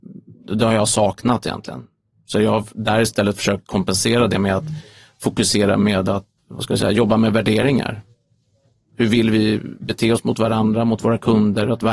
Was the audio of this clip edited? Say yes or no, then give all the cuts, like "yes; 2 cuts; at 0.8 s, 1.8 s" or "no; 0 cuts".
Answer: yes; 1 cut; at 6.4 s